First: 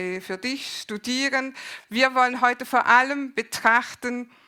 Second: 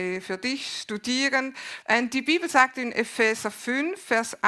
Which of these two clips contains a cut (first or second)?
second